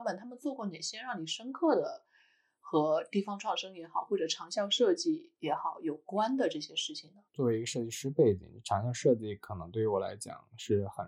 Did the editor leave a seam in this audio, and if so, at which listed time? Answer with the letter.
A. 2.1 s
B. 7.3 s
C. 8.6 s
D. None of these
B